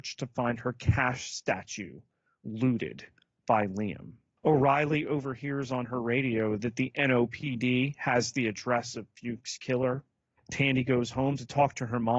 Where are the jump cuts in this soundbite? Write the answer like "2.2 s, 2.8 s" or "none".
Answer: 4.4 s, 10.4 s